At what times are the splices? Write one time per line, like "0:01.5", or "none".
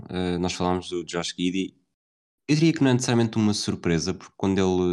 none